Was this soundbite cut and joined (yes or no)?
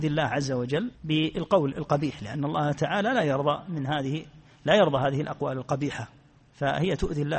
yes